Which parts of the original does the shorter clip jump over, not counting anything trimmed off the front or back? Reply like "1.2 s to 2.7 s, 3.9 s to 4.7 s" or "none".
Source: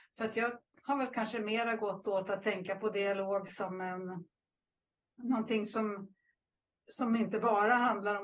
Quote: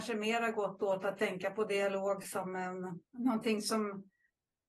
4.3 s to 5.1 s